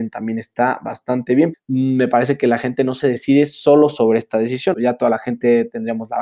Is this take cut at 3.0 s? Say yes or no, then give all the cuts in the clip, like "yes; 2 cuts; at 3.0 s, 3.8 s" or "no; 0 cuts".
no; 2 cuts; at 1.5 s, 4.7 s